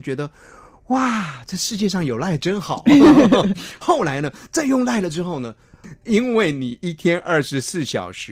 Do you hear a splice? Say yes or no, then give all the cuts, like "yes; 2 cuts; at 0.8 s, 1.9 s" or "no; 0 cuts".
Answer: yes; 1 cut; at 5.8 s